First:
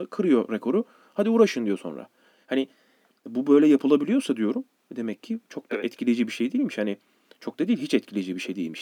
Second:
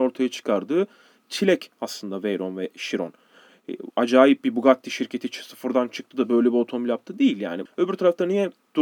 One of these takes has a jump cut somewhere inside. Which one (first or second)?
second